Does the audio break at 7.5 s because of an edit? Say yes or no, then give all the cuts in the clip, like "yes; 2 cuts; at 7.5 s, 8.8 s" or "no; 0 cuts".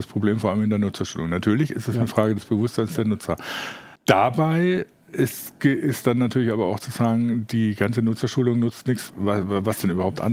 no; 2 cuts; at 4.0 s, 9.1 s